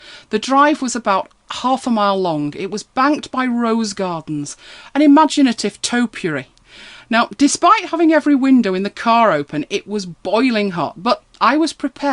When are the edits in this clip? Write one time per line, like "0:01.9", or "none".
0:07.0